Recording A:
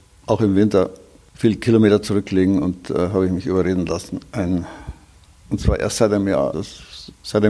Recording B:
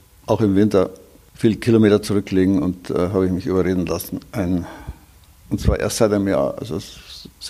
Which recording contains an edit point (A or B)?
A